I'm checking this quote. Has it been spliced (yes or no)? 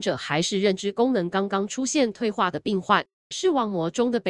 no